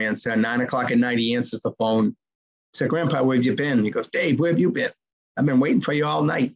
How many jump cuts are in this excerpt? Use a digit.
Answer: 0